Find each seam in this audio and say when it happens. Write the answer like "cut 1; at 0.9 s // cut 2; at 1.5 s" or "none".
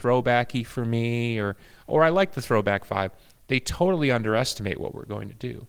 none